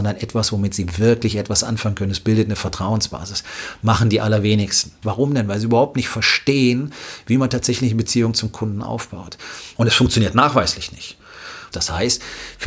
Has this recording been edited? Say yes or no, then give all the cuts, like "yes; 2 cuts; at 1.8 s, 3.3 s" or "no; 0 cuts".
yes; 3 cuts; at 5.0 s, 9.8 s, 11.7 s